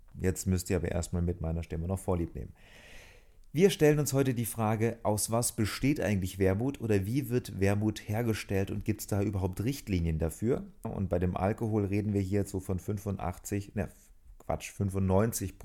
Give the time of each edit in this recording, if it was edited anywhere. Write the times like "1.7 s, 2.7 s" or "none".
10.8 s